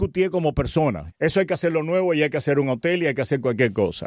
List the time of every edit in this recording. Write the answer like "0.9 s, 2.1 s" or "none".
1.1 s